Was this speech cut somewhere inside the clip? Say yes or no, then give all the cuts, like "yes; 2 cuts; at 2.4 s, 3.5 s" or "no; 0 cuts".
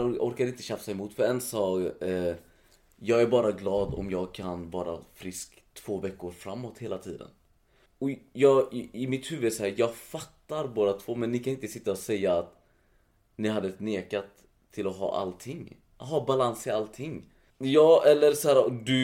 yes; 2 cuts; at 7.9 s, 17.5 s